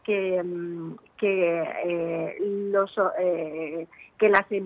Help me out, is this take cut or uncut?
uncut